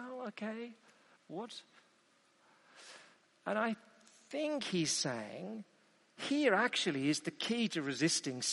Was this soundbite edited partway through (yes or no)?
yes